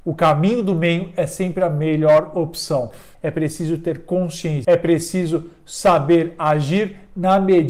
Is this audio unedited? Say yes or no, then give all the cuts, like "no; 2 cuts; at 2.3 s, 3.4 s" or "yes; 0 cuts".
no; 2 cuts; at 3.1 s, 4.6 s